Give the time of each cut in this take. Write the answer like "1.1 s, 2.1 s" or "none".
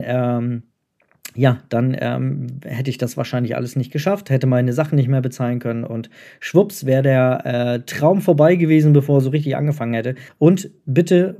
10.3 s

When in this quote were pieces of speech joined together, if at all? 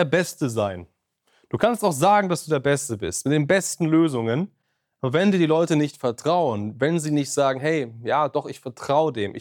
none

